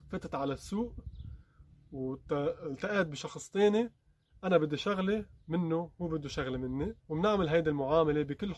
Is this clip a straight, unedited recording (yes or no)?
no